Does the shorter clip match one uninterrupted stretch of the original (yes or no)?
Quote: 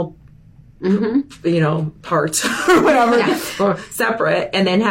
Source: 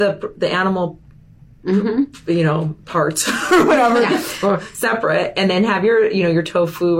yes